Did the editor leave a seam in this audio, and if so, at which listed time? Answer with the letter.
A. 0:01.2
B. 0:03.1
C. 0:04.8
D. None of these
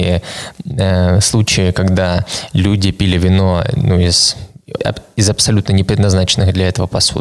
C